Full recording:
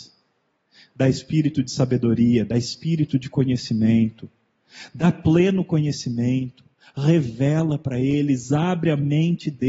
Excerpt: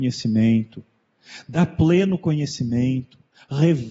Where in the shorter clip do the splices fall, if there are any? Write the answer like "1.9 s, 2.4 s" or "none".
none